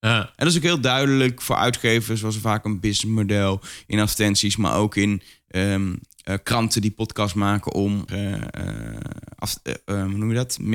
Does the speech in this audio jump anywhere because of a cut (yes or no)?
yes